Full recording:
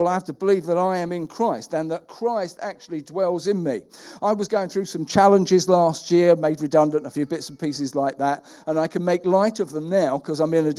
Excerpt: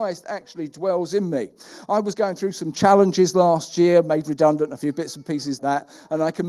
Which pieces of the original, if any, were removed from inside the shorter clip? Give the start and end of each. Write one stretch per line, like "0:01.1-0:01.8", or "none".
0:07.9-0:08.2